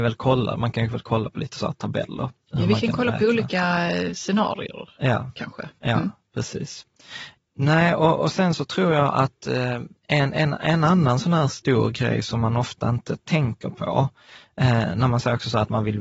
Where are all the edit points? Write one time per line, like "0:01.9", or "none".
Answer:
0:10.0